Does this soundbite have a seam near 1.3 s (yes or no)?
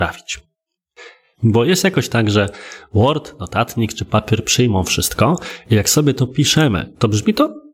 yes